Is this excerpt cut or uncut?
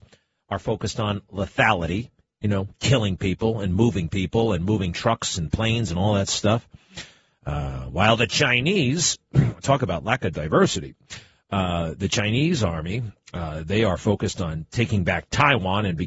uncut